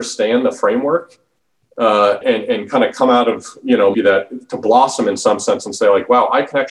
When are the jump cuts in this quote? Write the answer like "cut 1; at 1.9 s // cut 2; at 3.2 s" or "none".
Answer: cut 1; at 2.2 s // cut 2; at 3.9 s